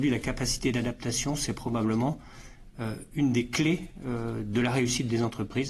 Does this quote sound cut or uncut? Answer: uncut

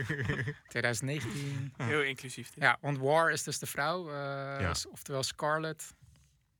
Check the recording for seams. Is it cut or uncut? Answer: uncut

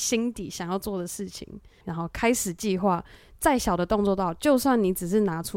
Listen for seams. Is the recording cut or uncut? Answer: cut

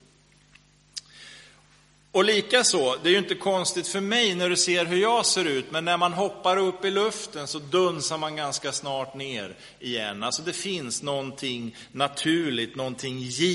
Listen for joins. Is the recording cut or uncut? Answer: uncut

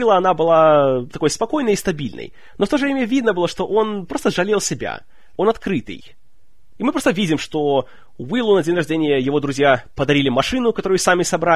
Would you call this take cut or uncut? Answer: cut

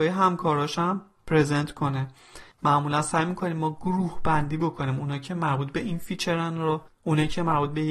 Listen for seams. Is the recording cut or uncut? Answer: cut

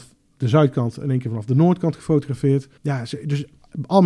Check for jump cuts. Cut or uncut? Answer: cut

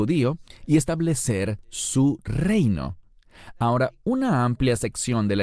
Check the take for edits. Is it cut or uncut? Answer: uncut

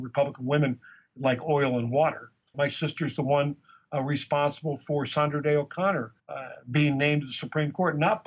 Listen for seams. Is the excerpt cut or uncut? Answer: cut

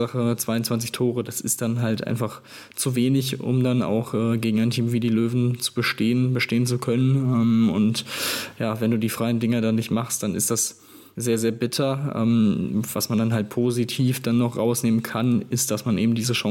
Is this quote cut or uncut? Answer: uncut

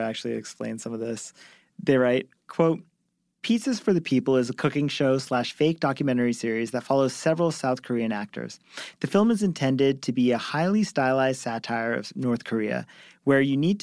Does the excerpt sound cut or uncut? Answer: uncut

